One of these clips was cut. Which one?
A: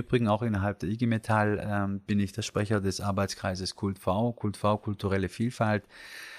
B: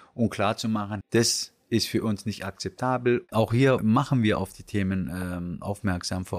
B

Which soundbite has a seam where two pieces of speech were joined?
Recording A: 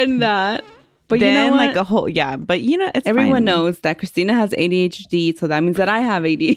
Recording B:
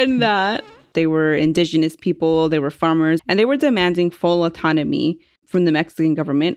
B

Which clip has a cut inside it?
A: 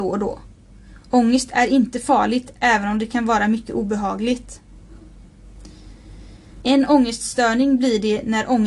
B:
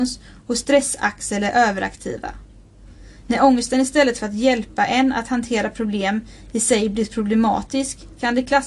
A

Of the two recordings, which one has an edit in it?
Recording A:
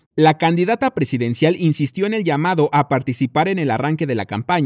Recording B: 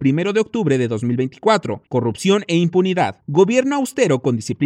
B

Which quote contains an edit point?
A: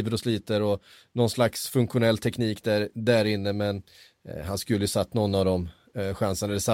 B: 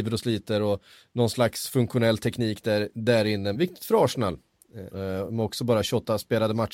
B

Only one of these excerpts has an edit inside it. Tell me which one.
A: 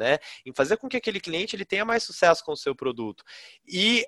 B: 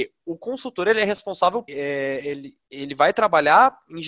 B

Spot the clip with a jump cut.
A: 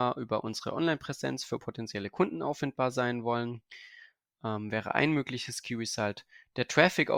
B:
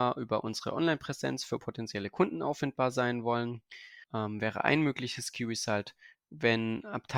B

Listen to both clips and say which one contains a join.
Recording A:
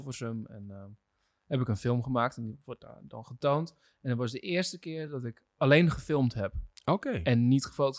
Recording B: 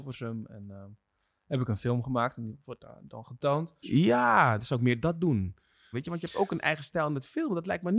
B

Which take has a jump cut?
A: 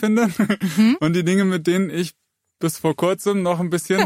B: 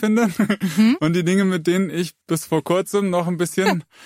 B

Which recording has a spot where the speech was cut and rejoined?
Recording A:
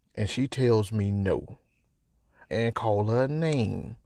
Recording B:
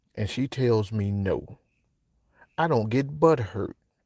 A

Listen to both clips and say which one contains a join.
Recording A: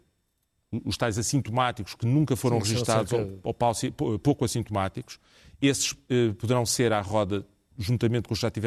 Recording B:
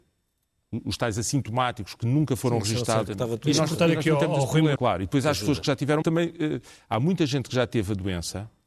B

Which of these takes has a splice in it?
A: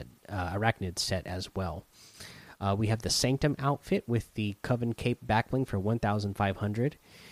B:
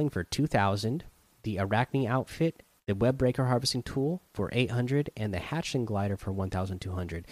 B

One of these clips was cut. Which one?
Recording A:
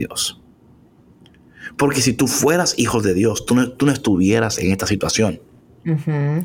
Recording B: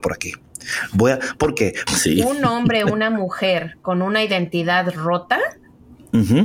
B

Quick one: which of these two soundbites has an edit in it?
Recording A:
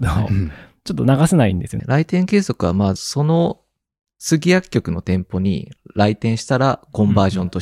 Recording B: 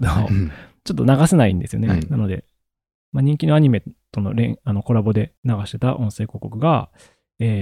A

